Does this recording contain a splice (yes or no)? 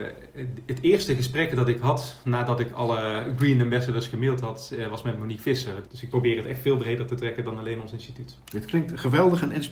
yes